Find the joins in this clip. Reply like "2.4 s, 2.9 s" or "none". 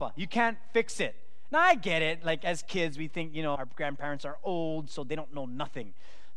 3.6 s